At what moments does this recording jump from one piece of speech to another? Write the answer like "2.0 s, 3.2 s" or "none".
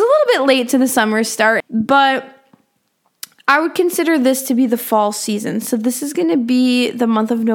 1.6 s